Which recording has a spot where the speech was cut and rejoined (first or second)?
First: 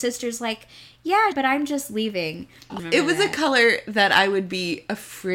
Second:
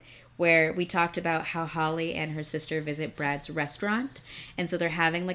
first